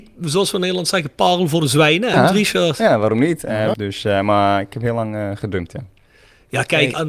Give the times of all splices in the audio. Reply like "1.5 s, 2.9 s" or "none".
2.1 s, 3.7 s